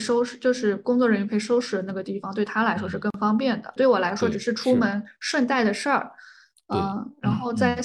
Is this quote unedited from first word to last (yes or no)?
no